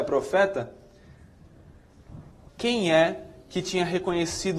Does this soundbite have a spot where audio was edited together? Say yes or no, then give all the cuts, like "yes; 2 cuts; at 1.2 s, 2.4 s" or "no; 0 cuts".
yes; 1 cut; at 2.5 s